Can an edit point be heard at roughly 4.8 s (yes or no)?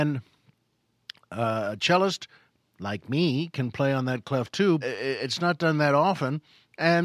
yes